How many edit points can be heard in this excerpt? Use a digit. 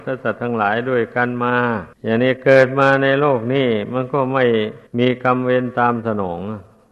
2